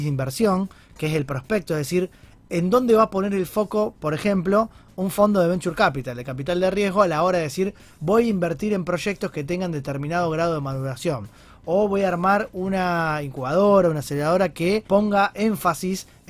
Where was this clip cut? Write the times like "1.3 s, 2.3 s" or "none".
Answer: 14.9 s